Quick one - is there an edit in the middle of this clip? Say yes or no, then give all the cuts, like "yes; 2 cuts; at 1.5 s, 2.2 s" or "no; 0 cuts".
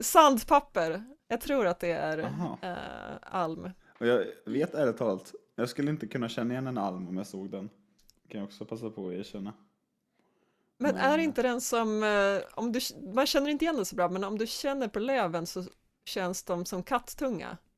yes; 2 cuts; at 1.2 s, 3.8 s